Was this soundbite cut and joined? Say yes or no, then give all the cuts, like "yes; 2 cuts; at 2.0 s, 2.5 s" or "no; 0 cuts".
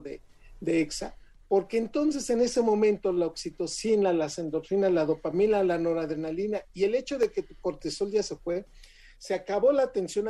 no; 0 cuts